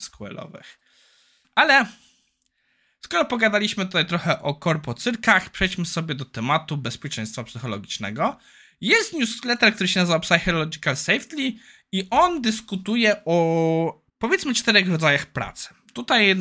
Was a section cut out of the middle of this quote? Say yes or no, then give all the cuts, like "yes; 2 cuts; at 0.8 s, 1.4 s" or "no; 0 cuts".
yes; 2 cuts; at 1.4 s, 14.1 s